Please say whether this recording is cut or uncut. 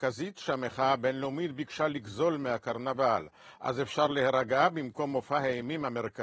uncut